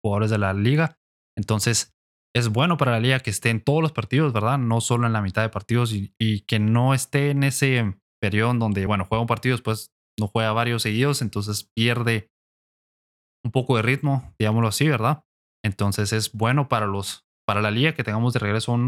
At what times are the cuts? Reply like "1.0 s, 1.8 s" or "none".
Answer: none